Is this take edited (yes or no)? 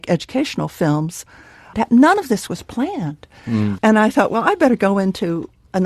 yes